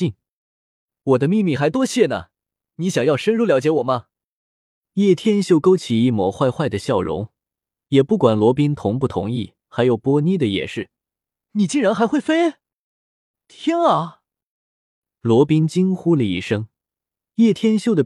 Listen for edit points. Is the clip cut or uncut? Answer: cut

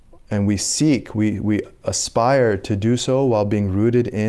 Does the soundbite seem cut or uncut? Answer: uncut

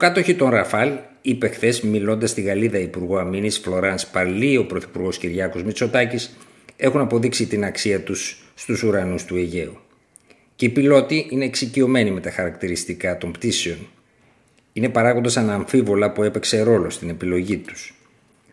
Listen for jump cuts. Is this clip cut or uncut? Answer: uncut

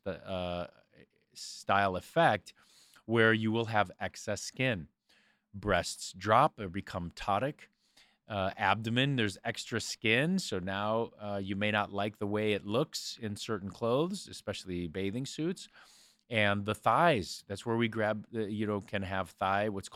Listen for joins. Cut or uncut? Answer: uncut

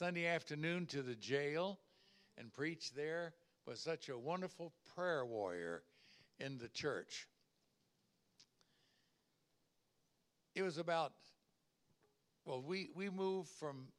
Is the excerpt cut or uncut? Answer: uncut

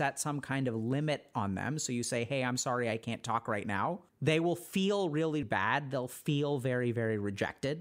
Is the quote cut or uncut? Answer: cut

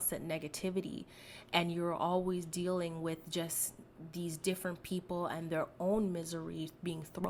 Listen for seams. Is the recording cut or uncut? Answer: uncut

